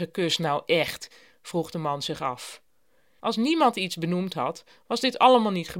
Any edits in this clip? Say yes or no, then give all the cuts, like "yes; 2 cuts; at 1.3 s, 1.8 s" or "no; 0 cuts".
yes; 1 cut; at 3.2 s